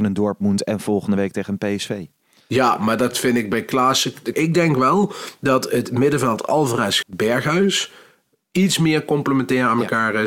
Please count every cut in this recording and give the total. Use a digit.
2